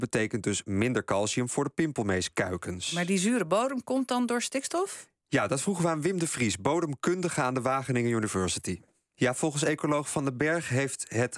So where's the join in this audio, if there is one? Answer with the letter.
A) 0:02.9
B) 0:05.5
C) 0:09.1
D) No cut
C